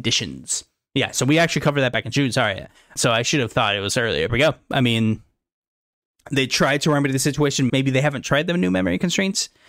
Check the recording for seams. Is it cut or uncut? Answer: cut